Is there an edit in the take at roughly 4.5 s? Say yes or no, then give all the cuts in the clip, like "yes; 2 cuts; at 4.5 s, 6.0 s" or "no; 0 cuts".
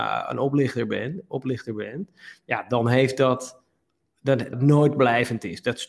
yes; 1 cut; at 4.5 s